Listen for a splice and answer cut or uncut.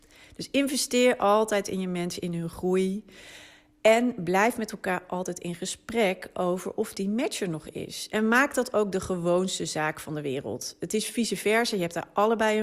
uncut